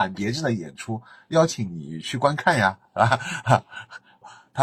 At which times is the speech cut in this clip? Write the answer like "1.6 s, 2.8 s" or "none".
none